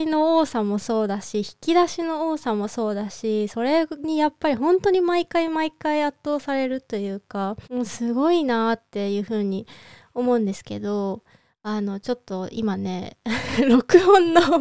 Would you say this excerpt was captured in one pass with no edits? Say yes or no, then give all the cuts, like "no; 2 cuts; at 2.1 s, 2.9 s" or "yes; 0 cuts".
no; 1 cut; at 7.6 s